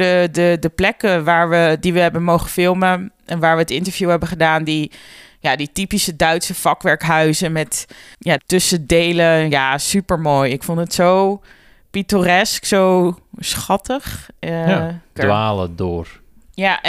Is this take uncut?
no; 2 cuts; at 8.4 s, 15.2 s

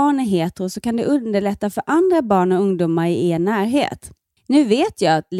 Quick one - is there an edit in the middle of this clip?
yes; 1 cut; at 4.4 s

